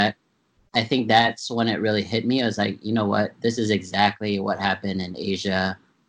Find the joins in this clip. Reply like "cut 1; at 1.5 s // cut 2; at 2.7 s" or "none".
none